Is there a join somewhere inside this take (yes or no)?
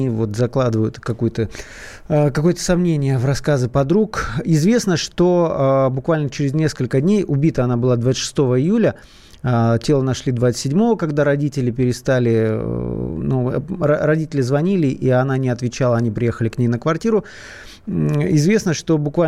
no